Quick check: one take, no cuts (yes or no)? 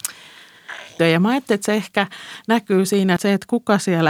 no